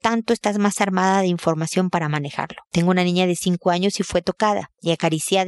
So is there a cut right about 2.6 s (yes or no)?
yes